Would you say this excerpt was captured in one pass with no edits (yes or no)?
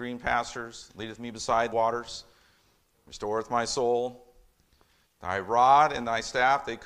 no